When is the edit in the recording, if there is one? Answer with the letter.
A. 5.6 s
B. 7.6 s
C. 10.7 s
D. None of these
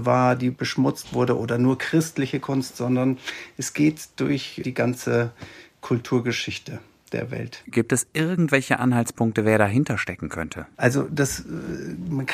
C